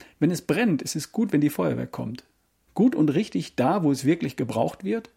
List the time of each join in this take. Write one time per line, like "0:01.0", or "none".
0:02.7